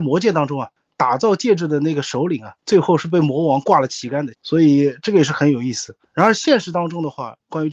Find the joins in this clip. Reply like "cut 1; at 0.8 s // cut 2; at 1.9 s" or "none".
cut 1; at 4.3 s